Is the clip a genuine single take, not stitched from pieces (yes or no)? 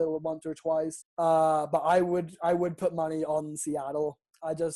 no